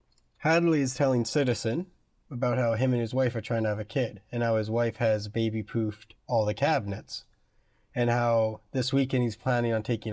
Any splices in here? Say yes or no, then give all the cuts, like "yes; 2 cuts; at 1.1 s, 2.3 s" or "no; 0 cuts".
yes; 1 cut; at 6.2 s